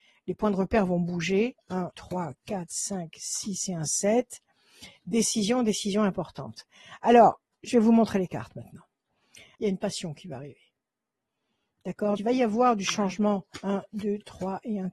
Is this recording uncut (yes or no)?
no